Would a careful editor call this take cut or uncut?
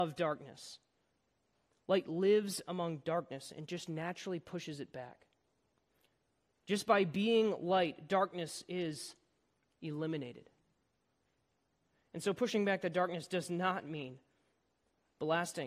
uncut